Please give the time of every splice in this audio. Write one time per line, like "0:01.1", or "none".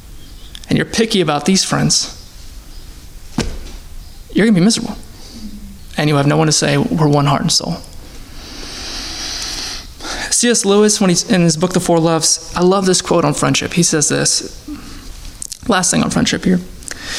none

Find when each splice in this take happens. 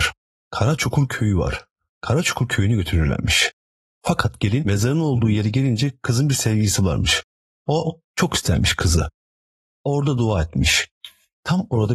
none

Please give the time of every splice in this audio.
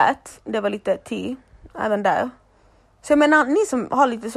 none

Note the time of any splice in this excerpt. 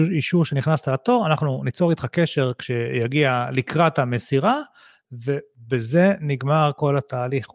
none

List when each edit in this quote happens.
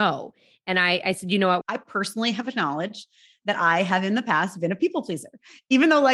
0:01.6

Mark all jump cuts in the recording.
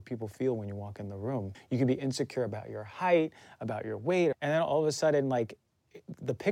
0:01.5
0:04.3

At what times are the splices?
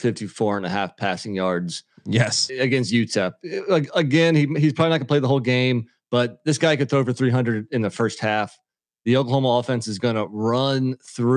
0:02.5

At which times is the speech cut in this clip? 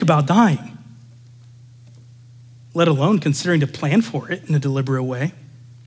none

